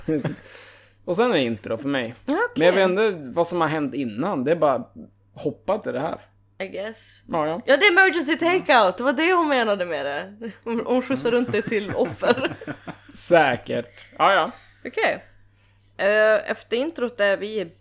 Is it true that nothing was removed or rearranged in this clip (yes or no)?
yes